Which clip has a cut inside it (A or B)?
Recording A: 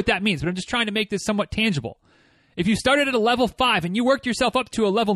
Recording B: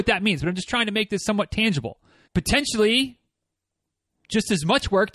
B